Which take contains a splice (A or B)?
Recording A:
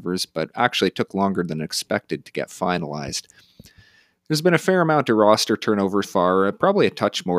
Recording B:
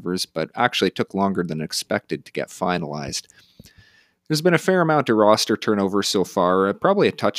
A